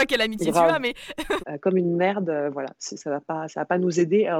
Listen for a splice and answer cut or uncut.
cut